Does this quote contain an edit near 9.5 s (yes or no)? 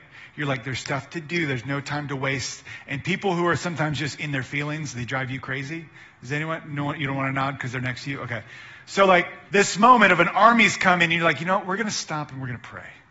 yes